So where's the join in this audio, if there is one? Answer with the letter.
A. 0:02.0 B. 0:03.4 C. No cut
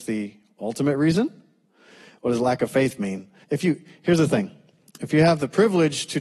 B